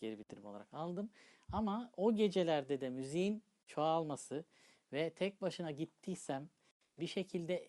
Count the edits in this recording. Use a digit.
0